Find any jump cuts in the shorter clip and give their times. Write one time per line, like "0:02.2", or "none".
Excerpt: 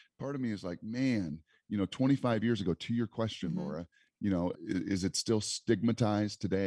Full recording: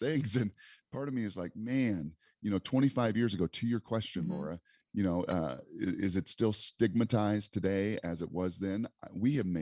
0:04.5